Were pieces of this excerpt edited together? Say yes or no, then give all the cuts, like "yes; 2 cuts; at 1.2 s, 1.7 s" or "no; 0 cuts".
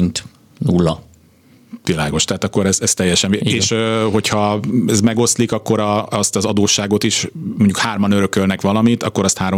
no; 0 cuts